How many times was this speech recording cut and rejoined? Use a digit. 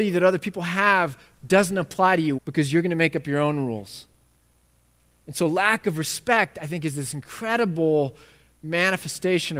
1